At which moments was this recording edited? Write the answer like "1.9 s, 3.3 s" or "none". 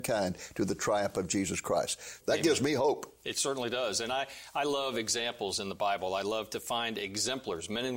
2.2 s